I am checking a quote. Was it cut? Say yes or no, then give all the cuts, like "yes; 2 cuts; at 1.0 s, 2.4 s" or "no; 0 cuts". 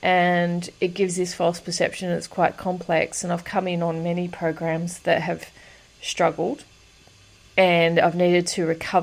no; 0 cuts